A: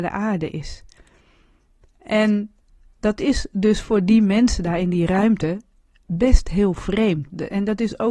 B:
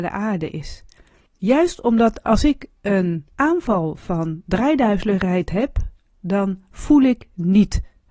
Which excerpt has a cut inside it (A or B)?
B